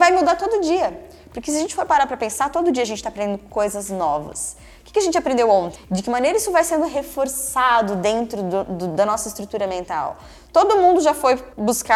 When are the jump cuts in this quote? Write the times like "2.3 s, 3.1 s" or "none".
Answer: 5.8 s